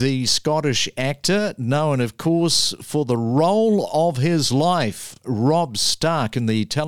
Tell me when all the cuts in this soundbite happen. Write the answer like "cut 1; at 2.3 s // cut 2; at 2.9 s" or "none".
none

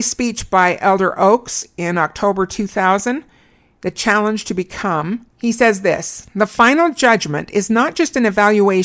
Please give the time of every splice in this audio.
cut 1; at 5.3 s

